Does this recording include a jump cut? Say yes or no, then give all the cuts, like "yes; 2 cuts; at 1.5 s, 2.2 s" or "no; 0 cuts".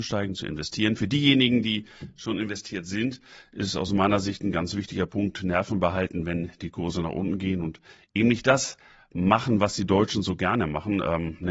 no; 0 cuts